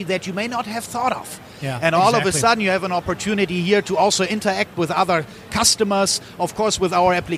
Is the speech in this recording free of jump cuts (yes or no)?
yes